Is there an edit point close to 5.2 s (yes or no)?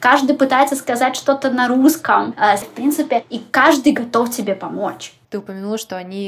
yes